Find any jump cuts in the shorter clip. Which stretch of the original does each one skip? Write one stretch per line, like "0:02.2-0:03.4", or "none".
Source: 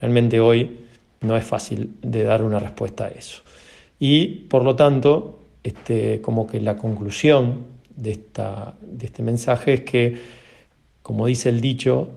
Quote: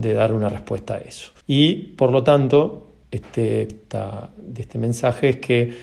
0:03.5-0:03.9
0:06.2-0:08.1